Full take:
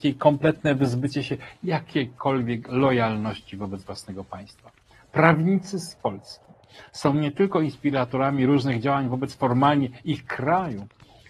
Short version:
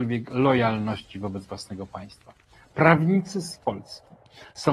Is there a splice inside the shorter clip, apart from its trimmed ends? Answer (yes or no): no